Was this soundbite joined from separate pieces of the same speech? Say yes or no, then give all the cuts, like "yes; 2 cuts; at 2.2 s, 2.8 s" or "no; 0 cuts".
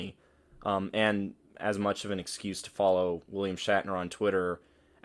no; 0 cuts